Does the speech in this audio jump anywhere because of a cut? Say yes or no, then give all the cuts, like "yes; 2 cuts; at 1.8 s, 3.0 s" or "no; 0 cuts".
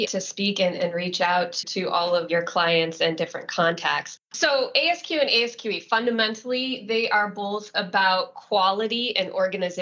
no; 0 cuts